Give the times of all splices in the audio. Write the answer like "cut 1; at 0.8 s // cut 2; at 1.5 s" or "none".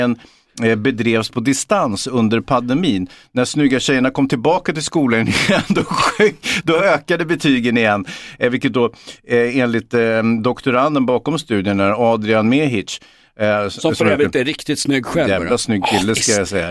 none